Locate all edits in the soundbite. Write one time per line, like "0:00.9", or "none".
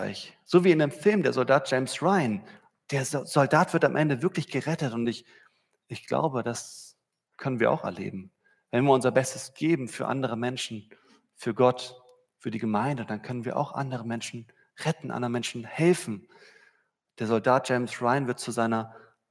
none